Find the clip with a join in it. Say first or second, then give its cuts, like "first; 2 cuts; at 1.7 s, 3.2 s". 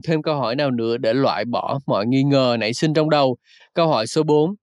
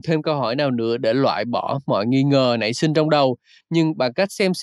first; 1 cut; at 3.6 s